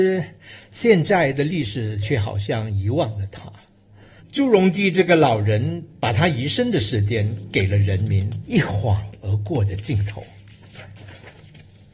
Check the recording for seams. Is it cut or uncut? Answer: cut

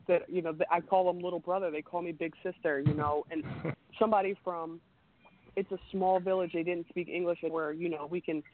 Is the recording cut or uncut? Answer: cut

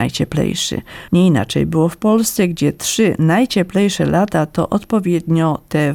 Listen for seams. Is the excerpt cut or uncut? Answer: cut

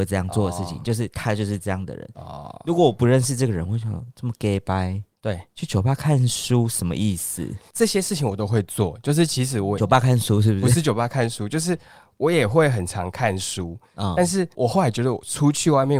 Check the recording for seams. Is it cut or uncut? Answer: uncut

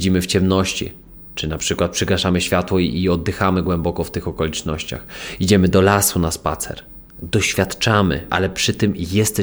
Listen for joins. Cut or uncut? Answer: cut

